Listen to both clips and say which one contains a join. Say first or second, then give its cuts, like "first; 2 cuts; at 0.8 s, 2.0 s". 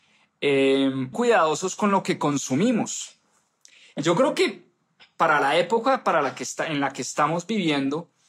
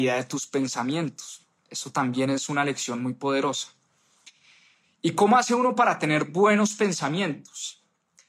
first; 1 cut; at 1.1 s